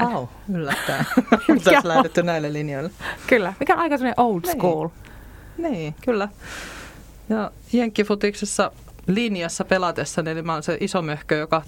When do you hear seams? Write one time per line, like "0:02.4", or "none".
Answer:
none